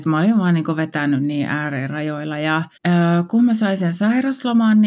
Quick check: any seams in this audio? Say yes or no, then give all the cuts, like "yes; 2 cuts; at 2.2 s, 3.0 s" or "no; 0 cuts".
yes; 1 cut; at 2.8 s